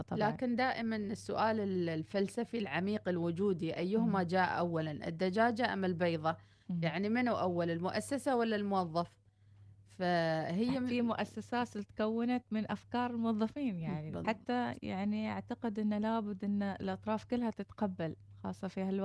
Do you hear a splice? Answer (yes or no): yes